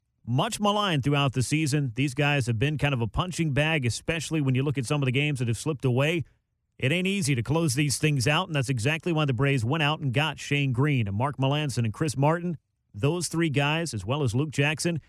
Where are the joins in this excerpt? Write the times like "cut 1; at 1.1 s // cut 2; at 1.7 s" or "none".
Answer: none